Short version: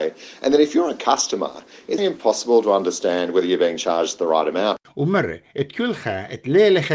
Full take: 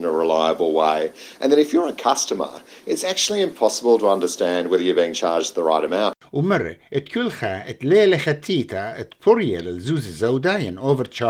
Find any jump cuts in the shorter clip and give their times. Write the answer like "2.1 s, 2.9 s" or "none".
2.0 s